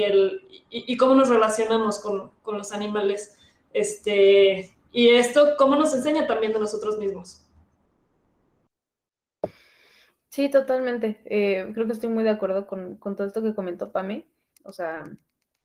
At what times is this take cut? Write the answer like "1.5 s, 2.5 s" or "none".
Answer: 14.6 s

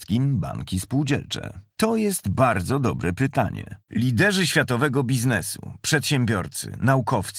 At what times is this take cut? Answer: 1.7 s, 3.8 s

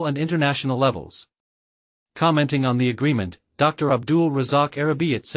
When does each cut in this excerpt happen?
2.0 s

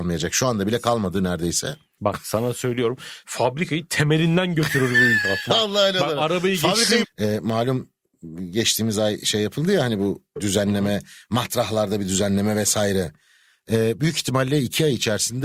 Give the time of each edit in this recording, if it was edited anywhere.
2.0 s, 7.0 s

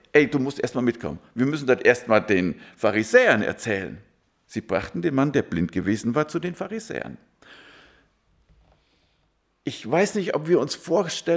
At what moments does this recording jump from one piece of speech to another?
none

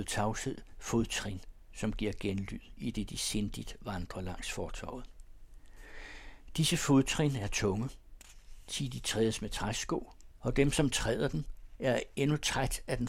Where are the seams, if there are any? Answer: none

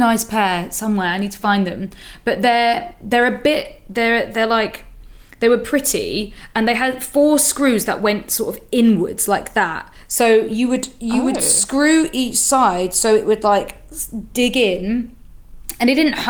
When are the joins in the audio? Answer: none

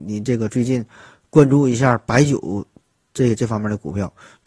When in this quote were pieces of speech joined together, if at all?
none

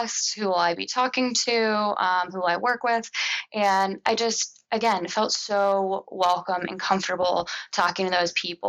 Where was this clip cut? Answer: none

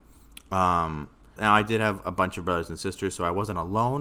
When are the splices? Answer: 1.4 s

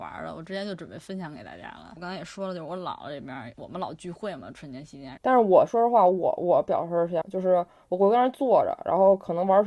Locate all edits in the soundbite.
5.2 s, 7.2 s

